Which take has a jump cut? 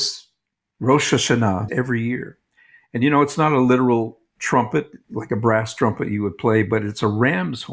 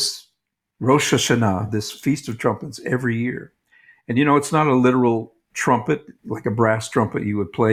first; 1 cut; at 1.7 s

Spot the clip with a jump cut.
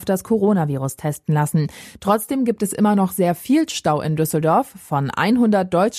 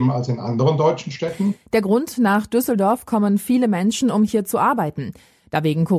first; 1 cut; at 1.9 s

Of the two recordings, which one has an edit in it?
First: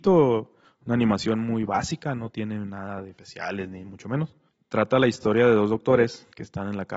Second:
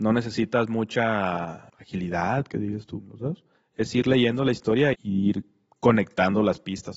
second; 1 cut; at 4.9 s

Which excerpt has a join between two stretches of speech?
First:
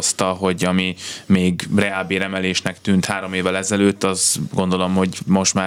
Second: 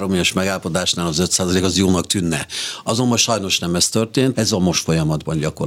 second; 1 cut; at 4.3 s

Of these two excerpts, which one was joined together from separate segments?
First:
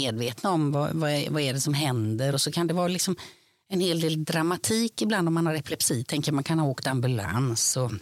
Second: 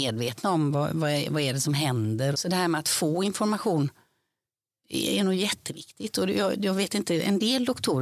second; 1 cut; at 2.3 s

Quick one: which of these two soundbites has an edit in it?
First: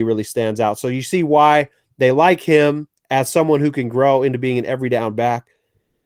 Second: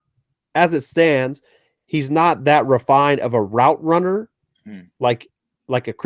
first; 1 cut; at 3.0 s

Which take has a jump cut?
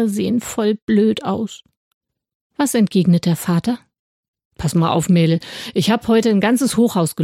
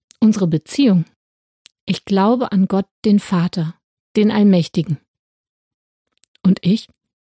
second; 1 cut; at 1.7 s

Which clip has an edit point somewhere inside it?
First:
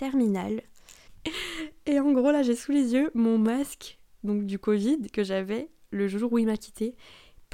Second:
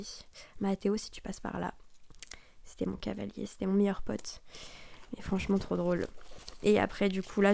first; 1 cut; at 1.1 s

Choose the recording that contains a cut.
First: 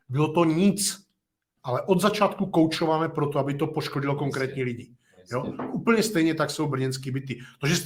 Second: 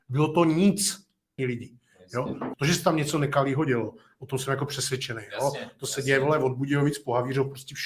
second; 2 cuts; at 1.4 s, 2.5 s

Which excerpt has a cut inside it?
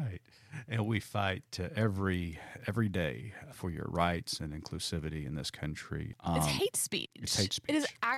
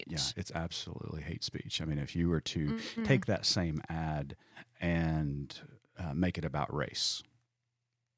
first; 2 cuts; at 3.5 s, 6.1 s

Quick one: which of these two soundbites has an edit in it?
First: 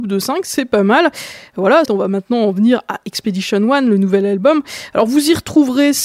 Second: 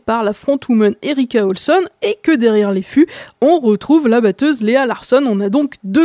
first; 1 cut; at 1.9 s

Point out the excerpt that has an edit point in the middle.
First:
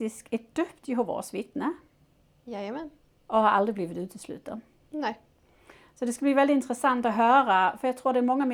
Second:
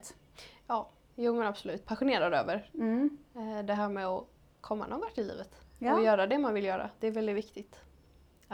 second; 1 cut; at 1.8 s

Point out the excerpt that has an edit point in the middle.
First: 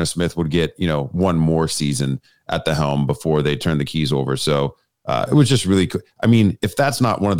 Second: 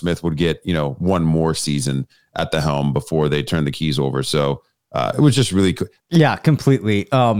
second; 1 cut; at 6.0 s

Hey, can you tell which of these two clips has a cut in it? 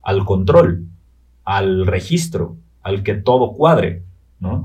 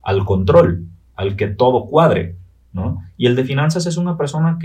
second; 1 cut; at 1.1 s

